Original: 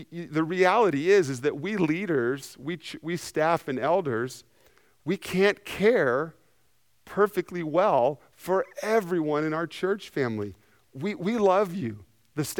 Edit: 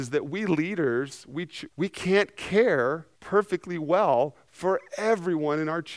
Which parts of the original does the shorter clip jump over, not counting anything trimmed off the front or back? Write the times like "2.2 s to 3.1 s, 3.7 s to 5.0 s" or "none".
3.0 s to 5.0 s, 6.4 s to 7.0 s